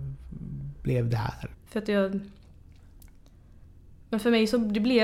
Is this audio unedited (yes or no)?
no